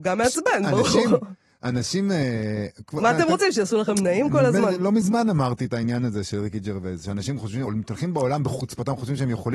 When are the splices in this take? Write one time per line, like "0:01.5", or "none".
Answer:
none